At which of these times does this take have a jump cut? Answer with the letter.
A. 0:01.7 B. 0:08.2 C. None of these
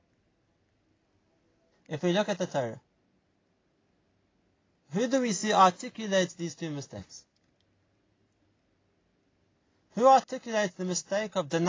A